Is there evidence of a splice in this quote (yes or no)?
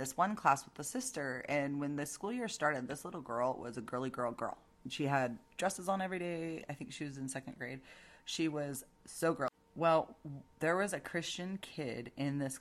no